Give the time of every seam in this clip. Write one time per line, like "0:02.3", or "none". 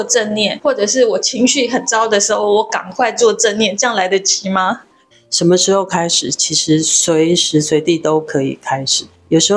0:05.1